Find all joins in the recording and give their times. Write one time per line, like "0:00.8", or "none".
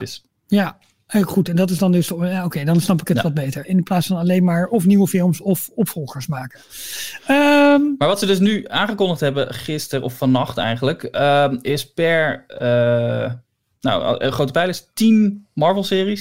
0:03.6